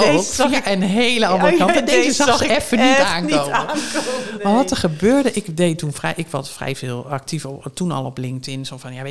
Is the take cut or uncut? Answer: uncut